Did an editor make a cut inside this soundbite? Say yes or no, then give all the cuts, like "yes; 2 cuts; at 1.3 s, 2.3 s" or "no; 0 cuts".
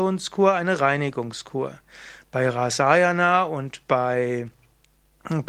no; 0 cuts